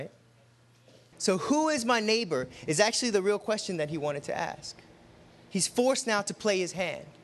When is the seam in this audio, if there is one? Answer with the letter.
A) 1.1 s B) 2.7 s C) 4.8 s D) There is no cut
A